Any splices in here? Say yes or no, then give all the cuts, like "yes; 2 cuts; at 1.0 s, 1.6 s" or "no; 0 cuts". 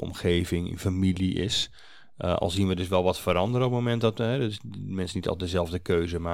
no; 0 cuts